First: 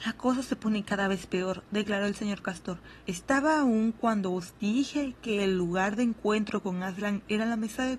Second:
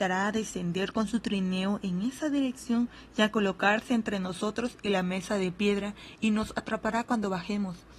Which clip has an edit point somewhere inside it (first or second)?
first